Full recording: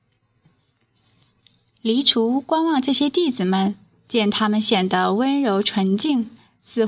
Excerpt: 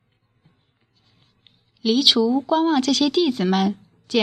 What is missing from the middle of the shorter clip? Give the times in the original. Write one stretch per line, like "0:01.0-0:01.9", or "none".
none

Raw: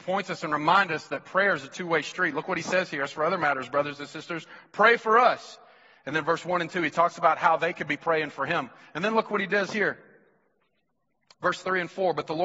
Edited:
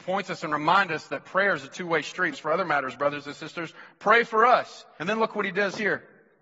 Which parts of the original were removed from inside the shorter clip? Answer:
0:02.3-0:03.0
0:05.7-0:08.9

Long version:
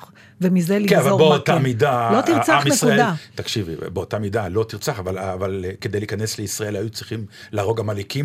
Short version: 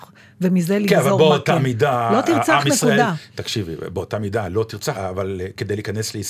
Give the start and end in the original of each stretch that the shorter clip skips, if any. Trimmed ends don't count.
0:04.9-0:05.2

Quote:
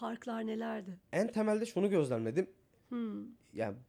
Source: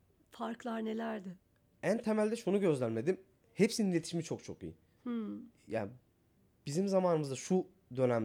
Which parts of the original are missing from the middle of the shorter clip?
0:01.4-0:01.7
0:03.5-0:04.9

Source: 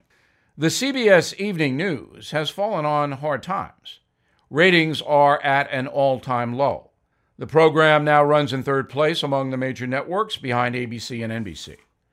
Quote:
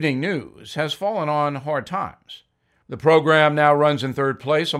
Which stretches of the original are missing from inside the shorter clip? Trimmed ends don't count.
0:04.4-0:07.3

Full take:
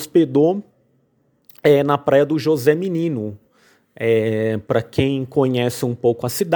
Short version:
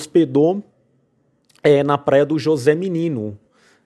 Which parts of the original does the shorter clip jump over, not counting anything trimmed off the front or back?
none

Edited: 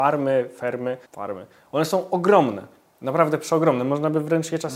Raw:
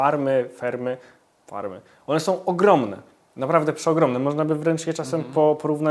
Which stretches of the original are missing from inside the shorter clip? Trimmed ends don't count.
0:01.0-0:01.4

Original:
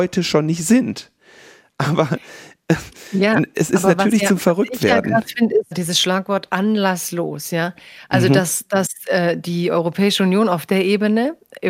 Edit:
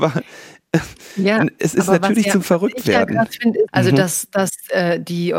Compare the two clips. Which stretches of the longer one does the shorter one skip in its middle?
0:05.6-0:08.1

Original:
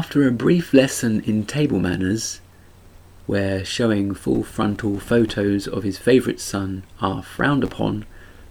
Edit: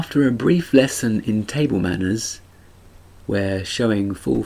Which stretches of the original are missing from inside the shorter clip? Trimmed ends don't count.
none

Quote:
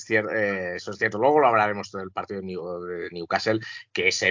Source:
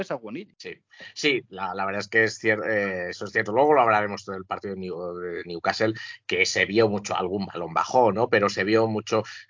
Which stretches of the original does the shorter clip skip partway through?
none

